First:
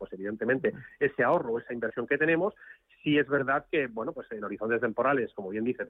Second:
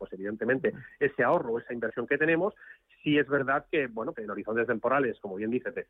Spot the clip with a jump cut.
second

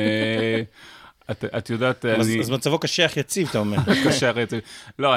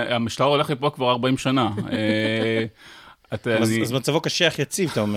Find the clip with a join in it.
second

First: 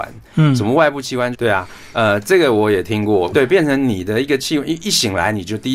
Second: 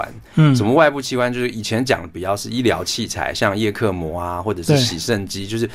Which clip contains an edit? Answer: first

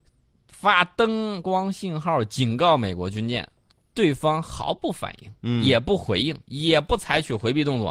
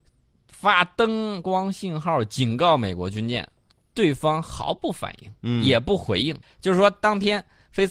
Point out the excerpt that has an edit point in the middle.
second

